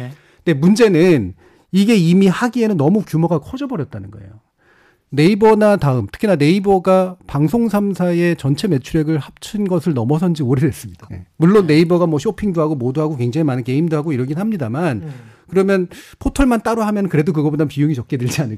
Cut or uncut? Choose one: cut